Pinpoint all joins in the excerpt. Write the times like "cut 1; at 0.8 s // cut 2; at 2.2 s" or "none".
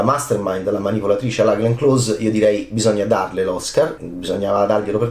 cut 1; at 4.0 s